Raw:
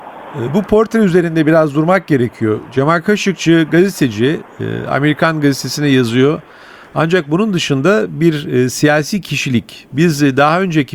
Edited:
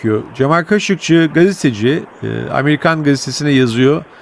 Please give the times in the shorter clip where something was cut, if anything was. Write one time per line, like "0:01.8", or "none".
none